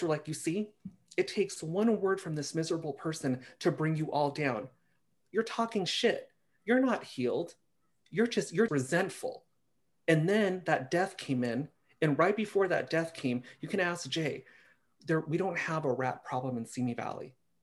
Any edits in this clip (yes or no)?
yes